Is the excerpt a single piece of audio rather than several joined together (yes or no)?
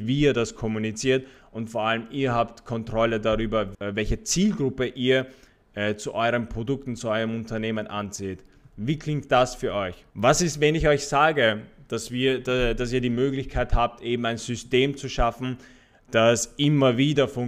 no